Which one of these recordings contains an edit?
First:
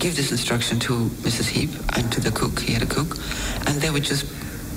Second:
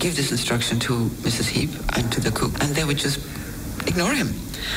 second; 1 cut; at 2.5 s

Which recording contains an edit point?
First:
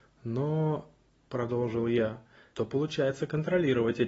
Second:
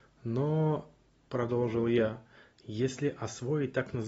first; 1 cut; at 2.5 s

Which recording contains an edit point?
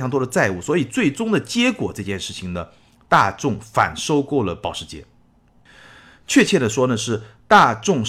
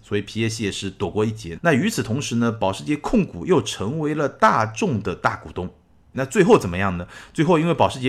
second; 2 cuts; at 1.5 s, 6.1 s

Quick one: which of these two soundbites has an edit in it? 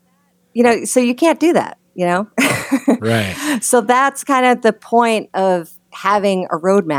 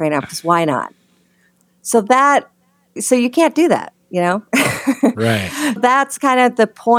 second; 2 cuts; at 3.0 s, 5.8 s

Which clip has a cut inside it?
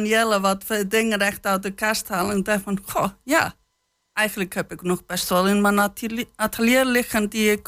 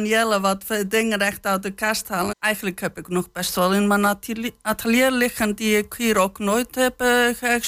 second; 1 cut; at 2.3 s

